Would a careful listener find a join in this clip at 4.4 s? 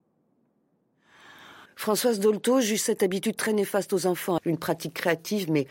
yes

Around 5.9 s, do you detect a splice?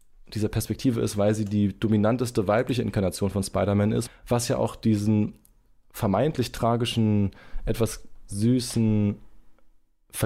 no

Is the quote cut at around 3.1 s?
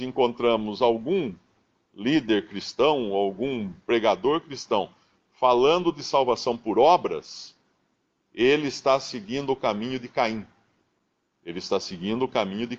no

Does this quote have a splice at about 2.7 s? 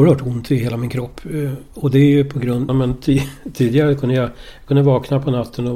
yes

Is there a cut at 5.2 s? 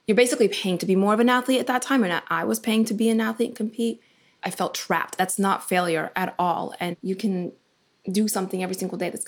yes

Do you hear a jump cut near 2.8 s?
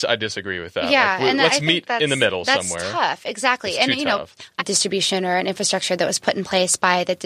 no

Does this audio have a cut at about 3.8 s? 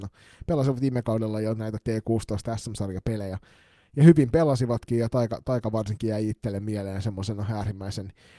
no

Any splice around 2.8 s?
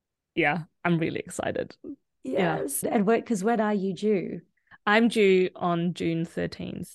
yes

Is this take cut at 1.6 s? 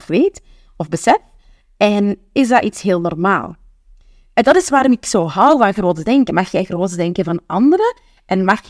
no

